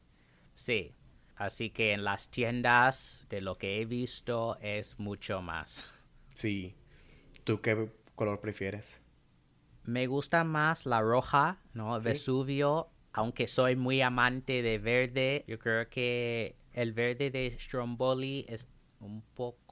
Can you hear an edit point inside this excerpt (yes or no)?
no